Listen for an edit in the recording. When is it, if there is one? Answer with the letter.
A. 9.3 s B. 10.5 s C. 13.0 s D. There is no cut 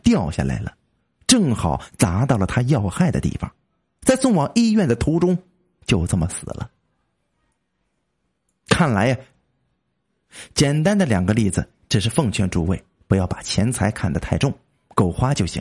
A